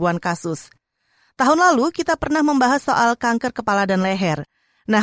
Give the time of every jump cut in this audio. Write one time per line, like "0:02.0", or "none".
none